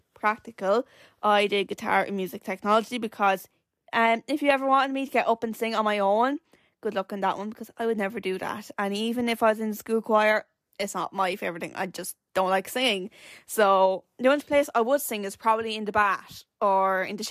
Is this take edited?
no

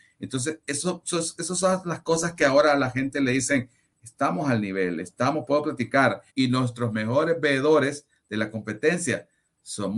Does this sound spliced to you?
yes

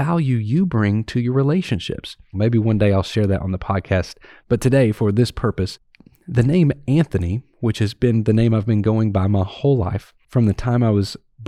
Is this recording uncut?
no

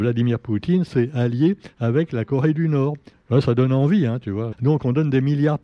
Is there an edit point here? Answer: yes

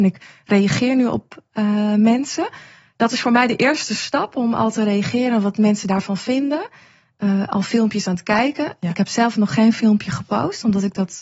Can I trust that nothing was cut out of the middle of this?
yes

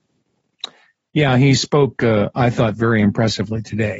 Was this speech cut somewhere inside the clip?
no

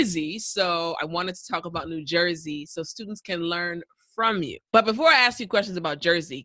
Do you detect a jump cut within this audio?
yes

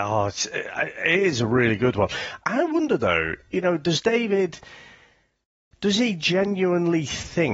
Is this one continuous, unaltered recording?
yes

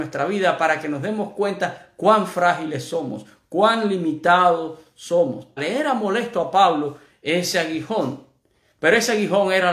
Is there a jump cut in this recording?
yes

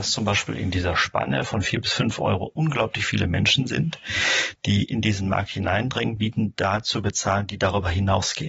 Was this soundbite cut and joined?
yes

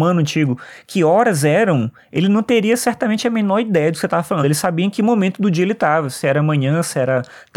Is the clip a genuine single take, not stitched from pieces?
yes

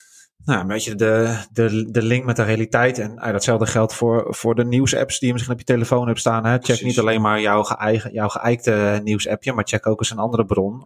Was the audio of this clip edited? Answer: no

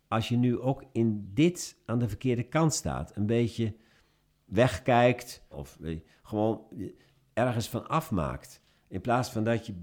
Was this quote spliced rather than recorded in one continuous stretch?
yes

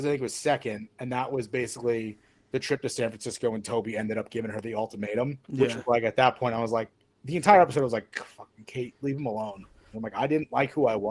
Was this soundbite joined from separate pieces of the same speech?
yes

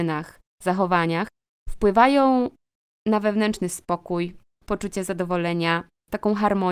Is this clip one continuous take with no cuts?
yes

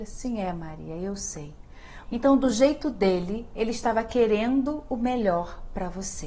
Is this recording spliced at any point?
yes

